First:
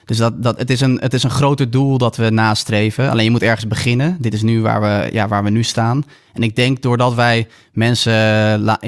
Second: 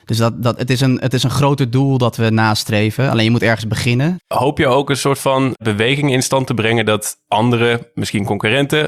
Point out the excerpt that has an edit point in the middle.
second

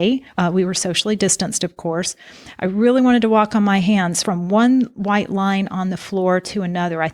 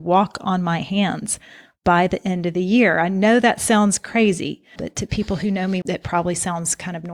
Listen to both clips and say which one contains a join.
second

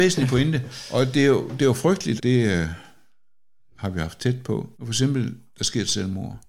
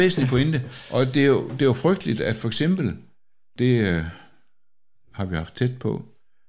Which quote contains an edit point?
first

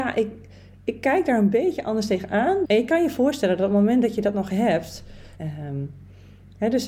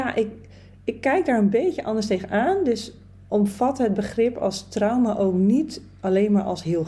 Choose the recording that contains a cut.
first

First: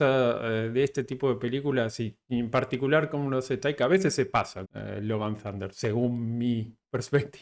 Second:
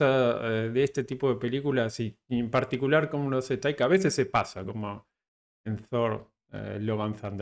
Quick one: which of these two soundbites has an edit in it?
first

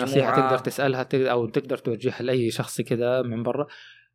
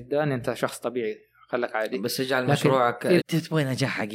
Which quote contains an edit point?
second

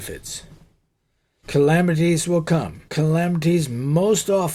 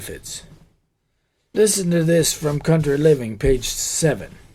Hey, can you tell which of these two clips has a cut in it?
first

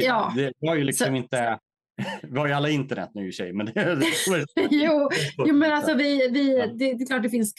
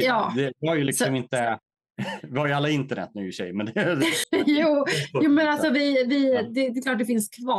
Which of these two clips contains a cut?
second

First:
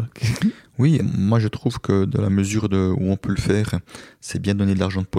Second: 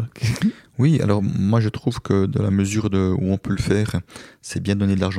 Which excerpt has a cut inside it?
first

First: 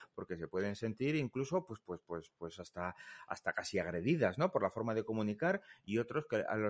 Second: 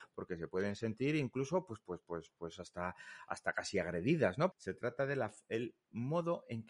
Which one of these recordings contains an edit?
second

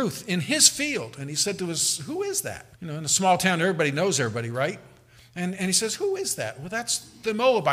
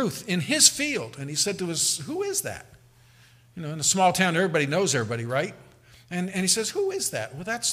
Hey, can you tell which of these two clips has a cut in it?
first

